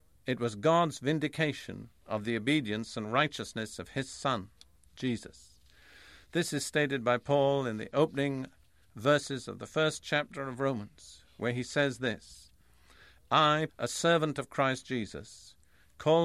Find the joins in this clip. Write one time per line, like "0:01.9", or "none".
0:13.7